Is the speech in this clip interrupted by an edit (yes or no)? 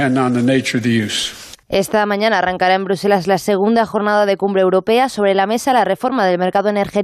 yes